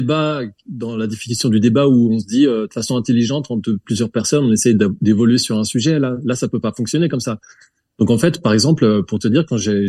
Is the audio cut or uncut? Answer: uncut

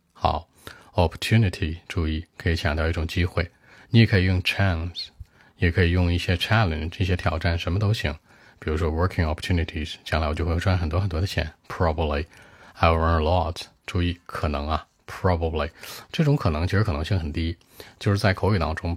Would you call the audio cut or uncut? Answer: uncut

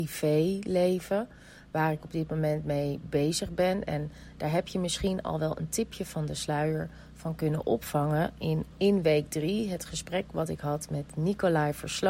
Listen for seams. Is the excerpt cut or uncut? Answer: uncut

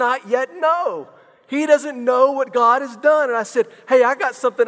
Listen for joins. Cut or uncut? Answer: uncut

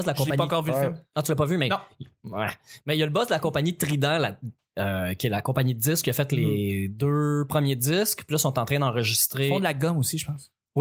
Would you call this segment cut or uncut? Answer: uncut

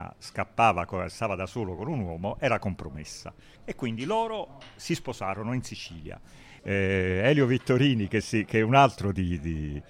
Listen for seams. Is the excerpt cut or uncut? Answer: cut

